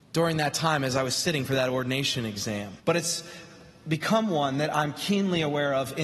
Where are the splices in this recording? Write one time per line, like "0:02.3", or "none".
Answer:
0:02.8